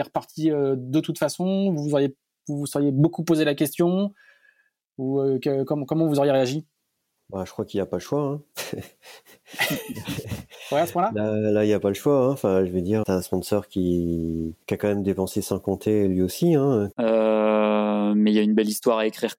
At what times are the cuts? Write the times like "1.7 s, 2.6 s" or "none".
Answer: 13.0 s, 14.6 s, 16.9 s